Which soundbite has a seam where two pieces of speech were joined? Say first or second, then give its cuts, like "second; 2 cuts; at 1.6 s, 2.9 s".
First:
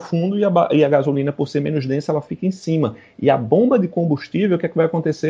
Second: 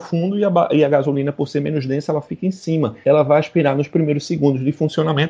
second; 1 cut; at 3.0 s